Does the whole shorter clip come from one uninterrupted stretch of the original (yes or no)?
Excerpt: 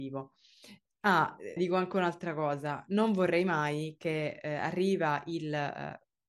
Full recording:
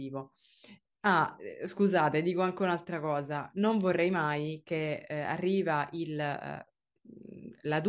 no